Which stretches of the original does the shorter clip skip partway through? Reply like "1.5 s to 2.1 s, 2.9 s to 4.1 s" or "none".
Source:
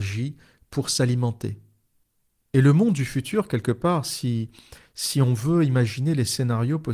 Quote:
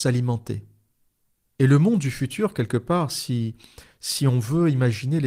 none

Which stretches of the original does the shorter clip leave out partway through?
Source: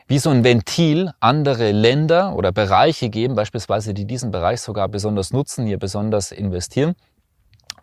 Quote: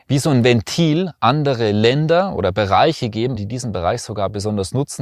3.4 s to 3.9 s

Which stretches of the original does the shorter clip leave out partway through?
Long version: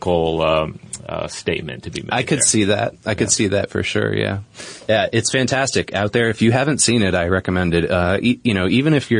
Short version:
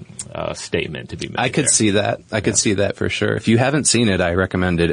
4.1 s to 6.3 s

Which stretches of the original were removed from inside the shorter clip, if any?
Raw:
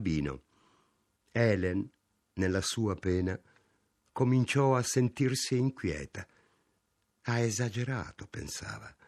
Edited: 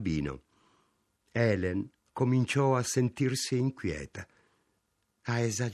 2.0 s to 4.0 s

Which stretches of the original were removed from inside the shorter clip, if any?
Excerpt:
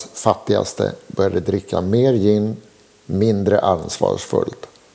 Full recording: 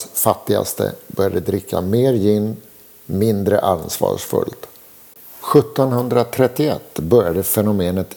none

